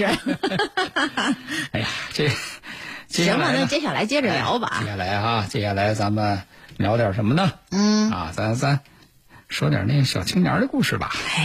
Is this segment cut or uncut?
uncut